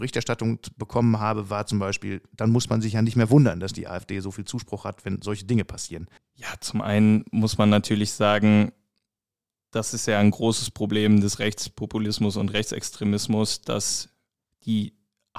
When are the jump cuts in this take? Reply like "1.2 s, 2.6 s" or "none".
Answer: 6.2 s